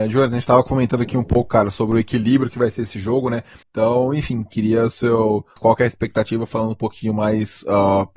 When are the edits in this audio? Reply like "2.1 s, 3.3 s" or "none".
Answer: 3.6 s, 5.6 s